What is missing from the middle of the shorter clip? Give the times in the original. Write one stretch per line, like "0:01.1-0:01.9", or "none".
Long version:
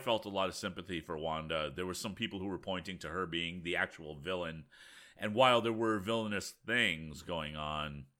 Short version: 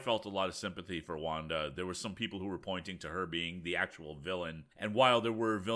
0:04.7-0:05.1